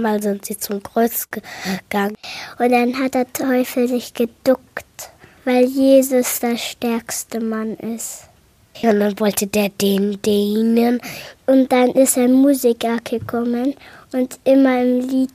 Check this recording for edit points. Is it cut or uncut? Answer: cut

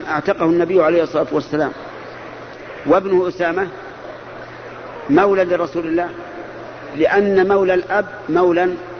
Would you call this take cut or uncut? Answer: uncut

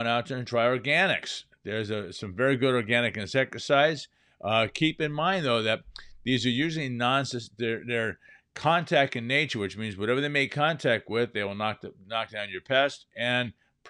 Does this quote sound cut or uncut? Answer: uncut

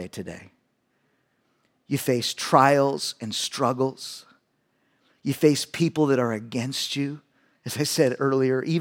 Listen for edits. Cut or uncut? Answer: uncut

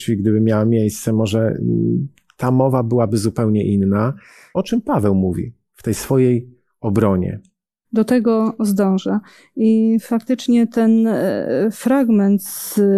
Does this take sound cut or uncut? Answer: cut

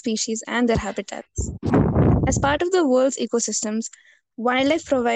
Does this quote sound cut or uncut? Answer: uncut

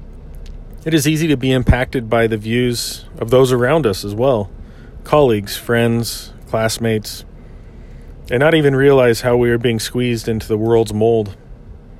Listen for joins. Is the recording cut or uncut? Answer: uncut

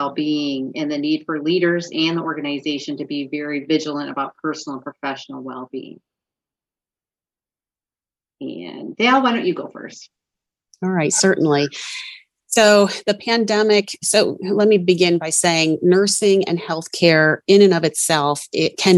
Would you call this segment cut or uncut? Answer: uncut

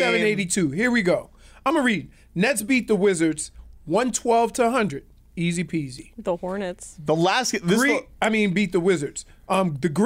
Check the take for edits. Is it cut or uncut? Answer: uncut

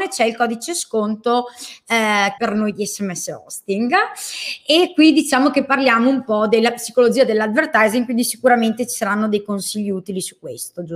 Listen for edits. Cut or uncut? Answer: cut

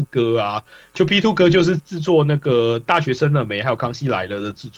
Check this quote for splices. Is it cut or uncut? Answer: cut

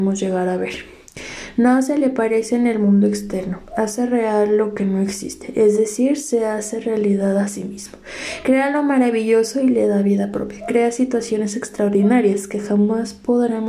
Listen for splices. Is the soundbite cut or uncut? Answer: uncut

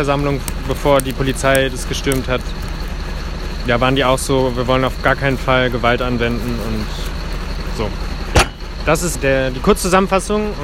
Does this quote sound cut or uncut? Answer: cut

